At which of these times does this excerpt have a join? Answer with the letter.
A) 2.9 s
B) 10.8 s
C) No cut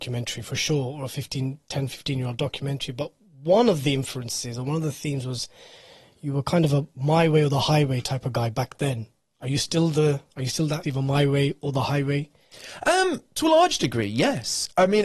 B